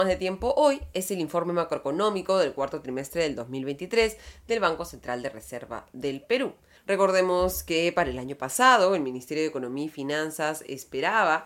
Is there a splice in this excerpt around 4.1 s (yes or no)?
no